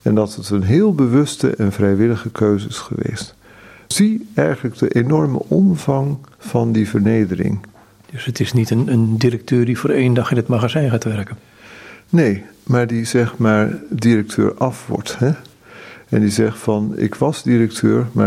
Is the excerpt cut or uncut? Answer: cut